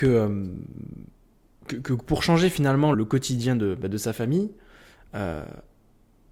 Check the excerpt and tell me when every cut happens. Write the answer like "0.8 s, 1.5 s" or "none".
2.9 s